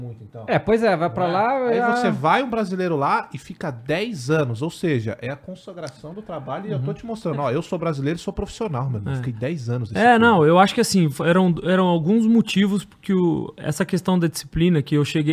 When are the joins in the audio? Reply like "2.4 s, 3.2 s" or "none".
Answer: none